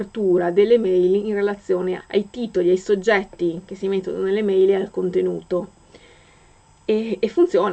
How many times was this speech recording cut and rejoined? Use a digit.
1